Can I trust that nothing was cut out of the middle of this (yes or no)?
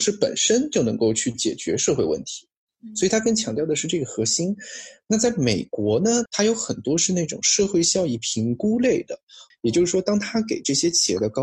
no